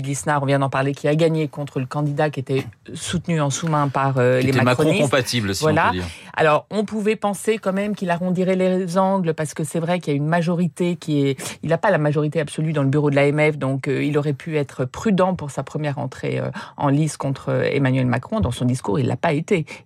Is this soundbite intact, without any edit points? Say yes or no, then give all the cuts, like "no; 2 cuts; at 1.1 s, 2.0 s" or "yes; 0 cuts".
yes; 0 cuts